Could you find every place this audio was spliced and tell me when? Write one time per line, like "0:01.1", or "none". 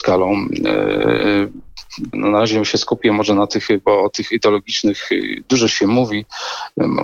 0:02.1